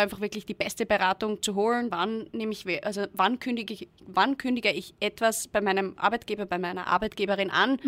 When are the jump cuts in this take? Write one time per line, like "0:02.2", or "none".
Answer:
0:01.9